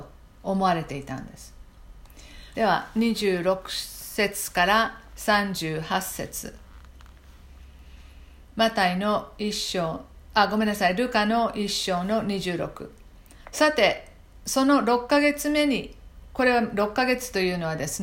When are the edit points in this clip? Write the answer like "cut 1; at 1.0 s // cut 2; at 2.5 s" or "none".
cut 1; at 2.5 s